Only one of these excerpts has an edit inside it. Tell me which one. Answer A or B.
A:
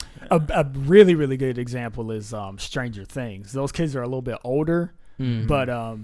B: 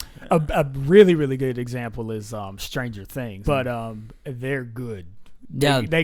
B